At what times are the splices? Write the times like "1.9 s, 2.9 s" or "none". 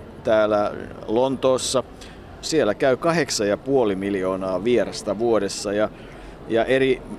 2.4 s

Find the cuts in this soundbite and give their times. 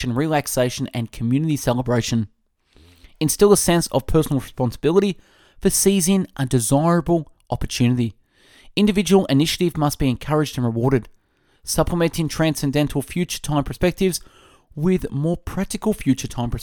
none

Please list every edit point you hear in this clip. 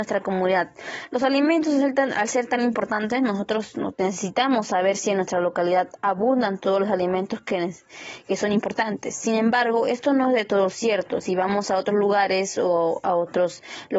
none

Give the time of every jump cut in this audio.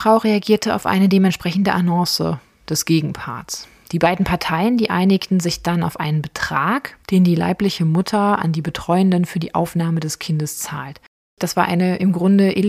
7.0 s, 11.2 s

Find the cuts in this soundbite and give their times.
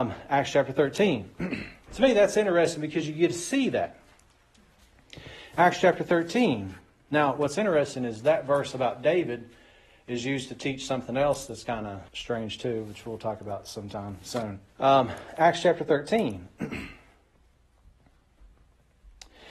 12.1 s, 14.7 s

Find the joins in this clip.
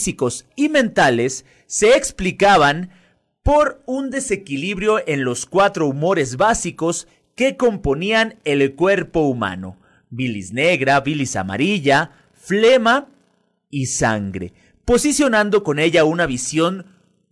none

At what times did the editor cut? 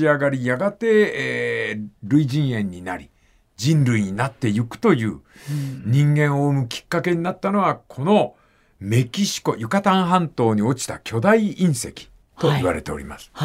none

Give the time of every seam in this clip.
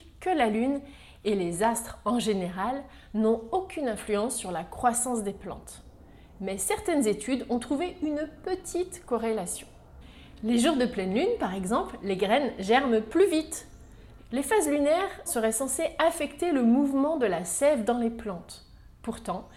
14.2 s, 15.3 s

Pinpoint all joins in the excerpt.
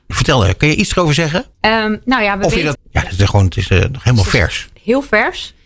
1.5 s, 2.7 s

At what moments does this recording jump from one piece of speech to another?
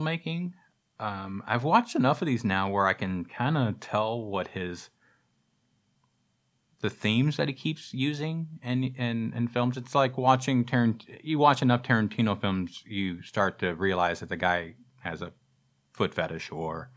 none

